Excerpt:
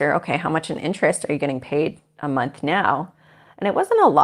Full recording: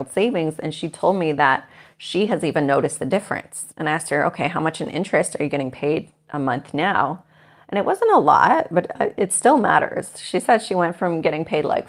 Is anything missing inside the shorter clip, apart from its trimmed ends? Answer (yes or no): no